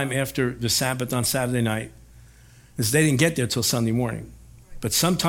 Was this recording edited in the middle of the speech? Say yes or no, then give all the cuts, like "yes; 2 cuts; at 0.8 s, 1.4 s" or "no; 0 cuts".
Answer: no; 0 cuts